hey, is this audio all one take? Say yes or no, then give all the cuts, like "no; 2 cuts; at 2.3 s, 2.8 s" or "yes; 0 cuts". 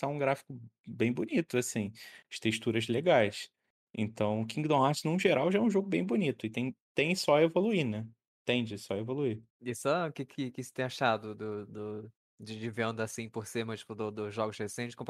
yes; 0 cuts